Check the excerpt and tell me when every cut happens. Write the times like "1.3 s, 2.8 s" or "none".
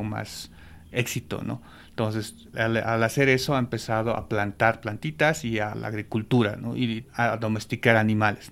2.5 s, 5.7 s, 7.0 s